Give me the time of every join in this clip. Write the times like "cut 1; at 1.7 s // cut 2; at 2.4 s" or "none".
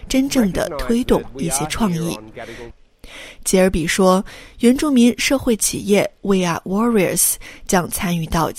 cut 1; at 2.7 s